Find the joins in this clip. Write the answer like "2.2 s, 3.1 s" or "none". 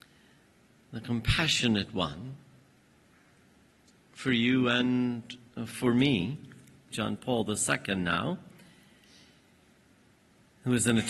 6.9 s

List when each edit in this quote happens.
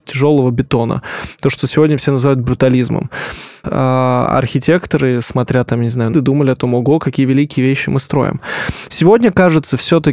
3.6 s, 6.1 s

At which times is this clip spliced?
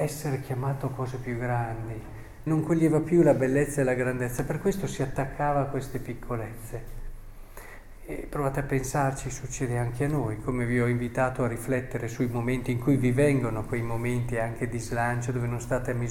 2.5 s

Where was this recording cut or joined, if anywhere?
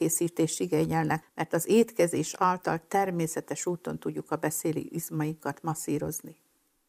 1.2 s

